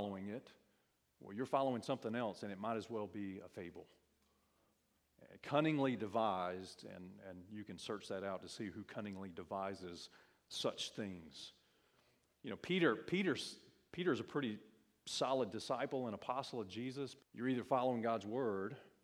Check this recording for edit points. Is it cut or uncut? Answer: cut